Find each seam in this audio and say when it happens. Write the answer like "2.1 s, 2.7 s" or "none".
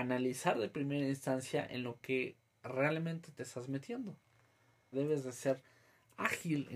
4.9 s